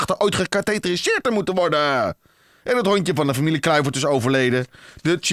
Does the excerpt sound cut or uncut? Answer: uncut